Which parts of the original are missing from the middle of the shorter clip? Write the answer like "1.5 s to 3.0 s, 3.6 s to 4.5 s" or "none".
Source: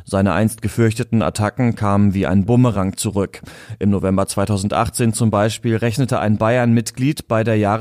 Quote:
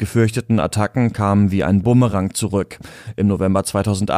none